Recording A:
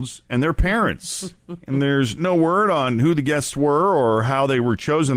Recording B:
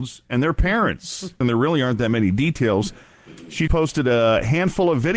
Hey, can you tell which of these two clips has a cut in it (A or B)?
B